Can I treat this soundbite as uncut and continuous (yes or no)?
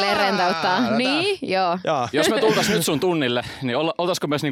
no